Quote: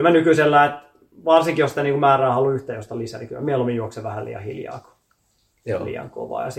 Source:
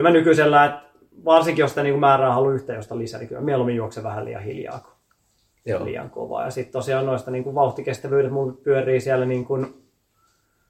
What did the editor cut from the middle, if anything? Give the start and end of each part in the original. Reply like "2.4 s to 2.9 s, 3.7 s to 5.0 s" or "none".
none